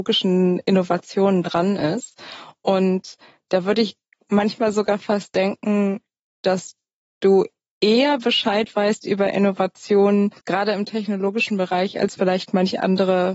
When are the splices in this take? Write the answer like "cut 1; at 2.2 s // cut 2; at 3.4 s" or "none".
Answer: cut 1; at 10.4 s

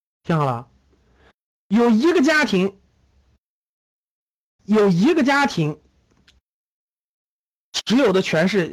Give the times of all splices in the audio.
cut 1; at 4.6 s

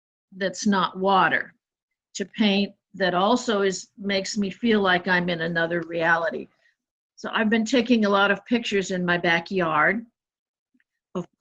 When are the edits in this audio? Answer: none

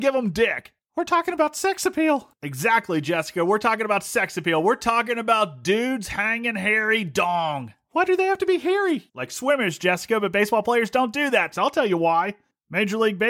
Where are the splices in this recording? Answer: cut 1; at 9.1 s // cut 2; at 11.5 s

